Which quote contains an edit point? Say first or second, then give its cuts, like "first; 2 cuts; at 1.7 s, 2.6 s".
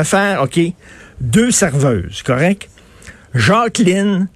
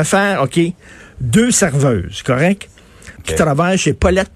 second; 1 cut; at 3.2 s